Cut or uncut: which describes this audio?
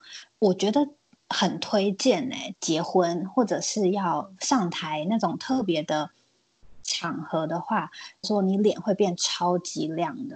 cut